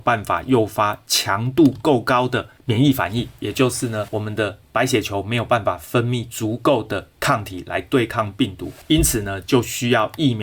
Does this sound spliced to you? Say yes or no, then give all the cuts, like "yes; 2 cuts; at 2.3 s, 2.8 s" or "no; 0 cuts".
no; 0 cuts